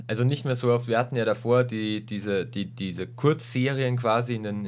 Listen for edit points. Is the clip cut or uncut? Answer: uncut